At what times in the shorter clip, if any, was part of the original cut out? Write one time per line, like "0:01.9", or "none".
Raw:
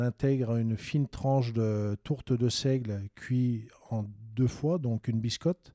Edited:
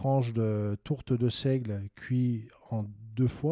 none